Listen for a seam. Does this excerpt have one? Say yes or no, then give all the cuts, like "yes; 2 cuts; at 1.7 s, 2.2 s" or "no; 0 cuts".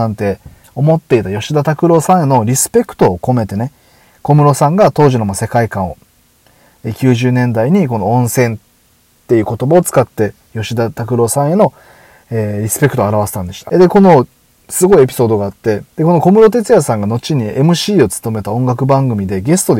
yes; 2 cuts; at 13.7 s, 15.9 s